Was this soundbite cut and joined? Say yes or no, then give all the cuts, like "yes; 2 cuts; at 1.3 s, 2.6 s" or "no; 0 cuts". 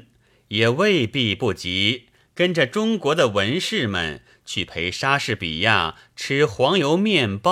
no; 0 cuts